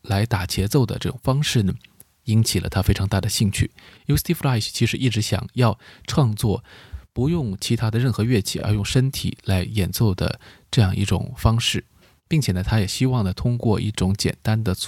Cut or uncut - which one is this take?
uncut